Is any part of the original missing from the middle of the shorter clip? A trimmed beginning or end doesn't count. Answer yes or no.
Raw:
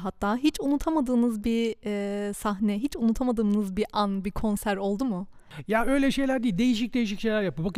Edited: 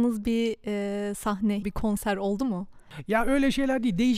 yes